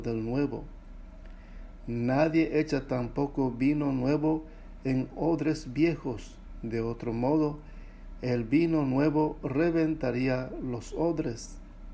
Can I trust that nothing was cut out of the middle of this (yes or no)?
yes